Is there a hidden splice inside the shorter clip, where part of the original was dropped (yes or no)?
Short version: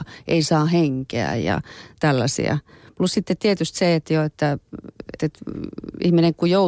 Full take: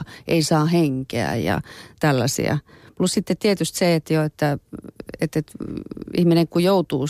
yes